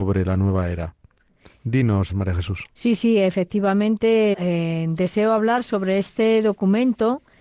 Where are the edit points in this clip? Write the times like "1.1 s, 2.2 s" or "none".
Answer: 2.1 s, 4.3 s